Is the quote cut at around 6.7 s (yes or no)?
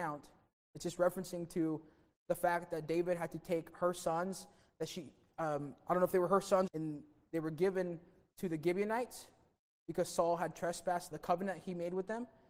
yes